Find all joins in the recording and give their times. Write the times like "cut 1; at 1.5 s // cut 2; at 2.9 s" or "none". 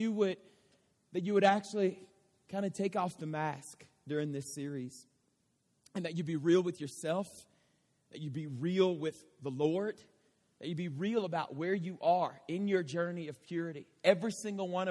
none